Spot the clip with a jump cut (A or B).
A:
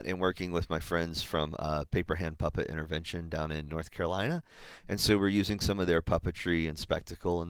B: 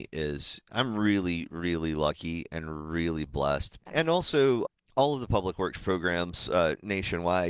B